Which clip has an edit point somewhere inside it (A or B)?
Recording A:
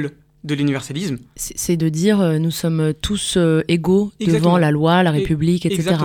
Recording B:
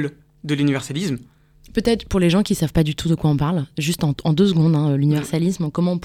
A